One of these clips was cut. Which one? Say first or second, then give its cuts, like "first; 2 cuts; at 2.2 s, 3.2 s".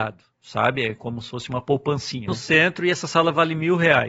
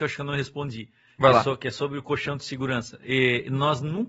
first; 1 cut; at 2.3 s